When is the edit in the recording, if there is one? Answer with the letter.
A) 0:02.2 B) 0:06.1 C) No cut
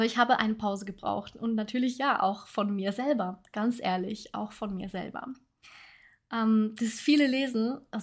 C